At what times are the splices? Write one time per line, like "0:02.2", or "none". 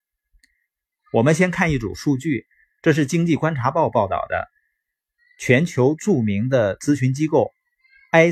none